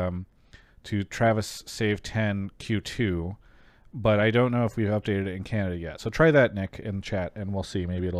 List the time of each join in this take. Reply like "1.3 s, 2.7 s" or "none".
none